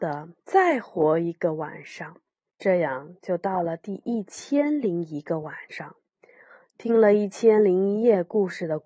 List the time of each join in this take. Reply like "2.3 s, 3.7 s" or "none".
2.5 s